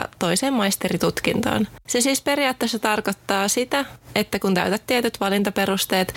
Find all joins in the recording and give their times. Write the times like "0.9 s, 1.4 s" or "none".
1.8 s